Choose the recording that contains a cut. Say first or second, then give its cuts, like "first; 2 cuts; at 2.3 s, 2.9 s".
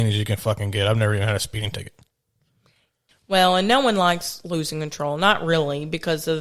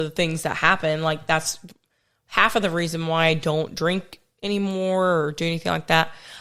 first; 1 cut; at 3.1 s